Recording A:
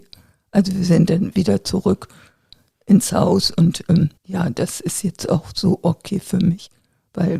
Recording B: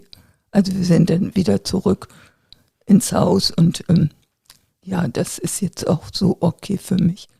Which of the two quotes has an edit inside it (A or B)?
A